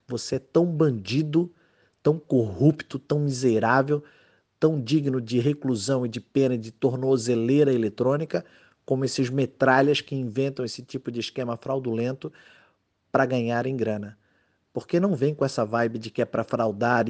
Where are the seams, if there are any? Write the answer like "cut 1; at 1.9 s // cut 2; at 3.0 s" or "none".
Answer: none